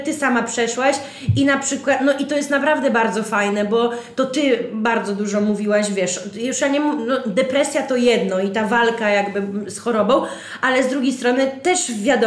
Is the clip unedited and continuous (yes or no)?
yes